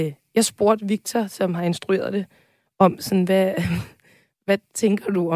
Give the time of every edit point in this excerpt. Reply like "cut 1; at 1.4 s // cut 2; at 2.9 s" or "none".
none